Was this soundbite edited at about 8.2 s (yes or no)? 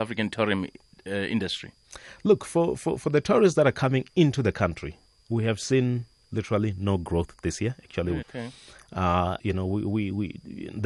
yes